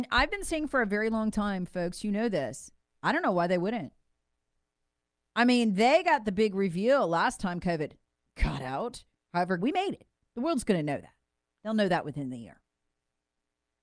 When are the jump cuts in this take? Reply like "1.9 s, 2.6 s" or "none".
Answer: 9.6 s